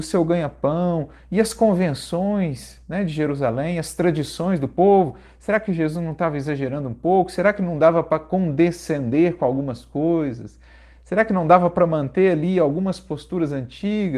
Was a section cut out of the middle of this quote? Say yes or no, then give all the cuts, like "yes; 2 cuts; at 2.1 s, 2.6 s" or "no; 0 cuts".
no; 0 cuts